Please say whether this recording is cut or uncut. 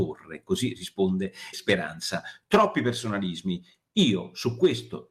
cut